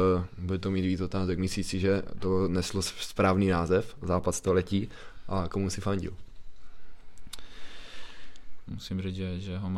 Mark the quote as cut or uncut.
cut